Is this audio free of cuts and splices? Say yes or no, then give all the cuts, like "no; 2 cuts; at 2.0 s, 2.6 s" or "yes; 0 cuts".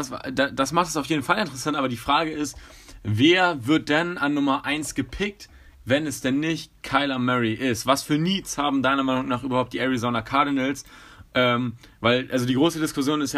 yes; 0 cuts